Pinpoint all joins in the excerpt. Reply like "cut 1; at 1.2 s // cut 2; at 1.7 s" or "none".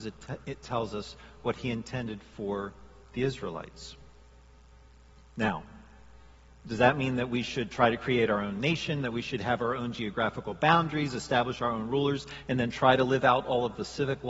none